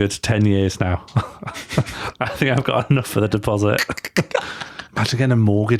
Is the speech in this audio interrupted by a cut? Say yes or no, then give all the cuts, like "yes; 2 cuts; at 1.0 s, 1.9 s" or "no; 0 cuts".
no; 0 cuts